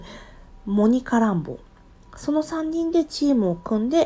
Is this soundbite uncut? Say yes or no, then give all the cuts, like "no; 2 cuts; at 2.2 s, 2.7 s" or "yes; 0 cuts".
yes; 0 cuts